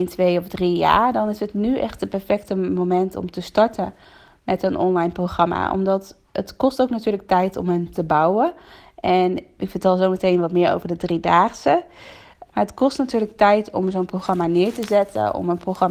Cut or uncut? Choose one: cut